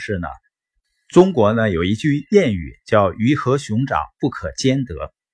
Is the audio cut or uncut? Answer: uncut